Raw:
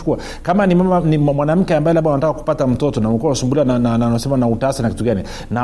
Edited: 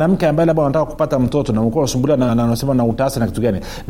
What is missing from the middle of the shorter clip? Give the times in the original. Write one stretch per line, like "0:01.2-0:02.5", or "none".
0:03.8-0:03.9